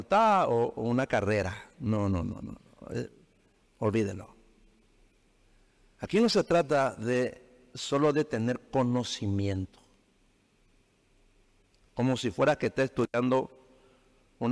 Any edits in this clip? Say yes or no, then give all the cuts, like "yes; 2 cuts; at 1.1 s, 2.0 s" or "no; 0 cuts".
yes; 2 cuts; at 3.6 s, 11.8 s